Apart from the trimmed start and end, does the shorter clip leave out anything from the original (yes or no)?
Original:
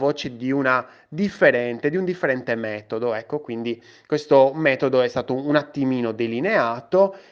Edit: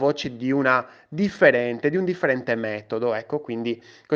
no